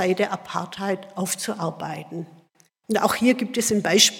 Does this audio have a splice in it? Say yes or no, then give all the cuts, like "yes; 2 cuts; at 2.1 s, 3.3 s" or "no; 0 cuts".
yes; 1 cut; at 2.7 s